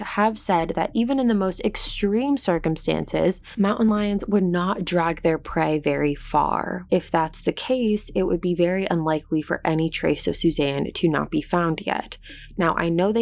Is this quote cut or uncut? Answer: cut